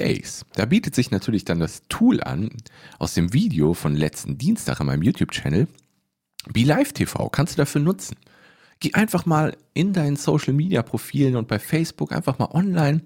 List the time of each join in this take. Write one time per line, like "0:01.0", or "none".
none